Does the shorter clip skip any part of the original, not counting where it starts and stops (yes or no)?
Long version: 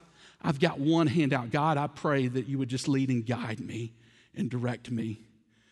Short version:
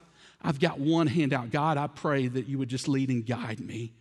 no